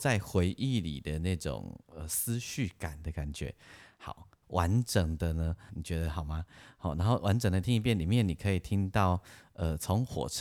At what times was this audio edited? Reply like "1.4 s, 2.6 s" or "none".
4.4 s, 5.7 s